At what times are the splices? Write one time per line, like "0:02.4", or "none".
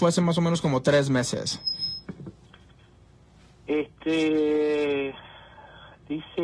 none